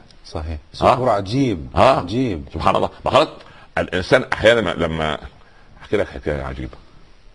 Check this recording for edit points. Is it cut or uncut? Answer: cut